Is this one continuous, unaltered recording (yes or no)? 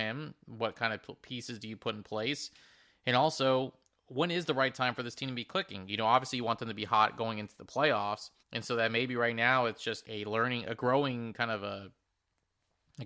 no